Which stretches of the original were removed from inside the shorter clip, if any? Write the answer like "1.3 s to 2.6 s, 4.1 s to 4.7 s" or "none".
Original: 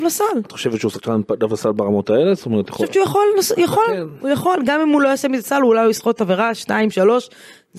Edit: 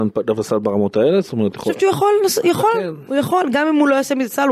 none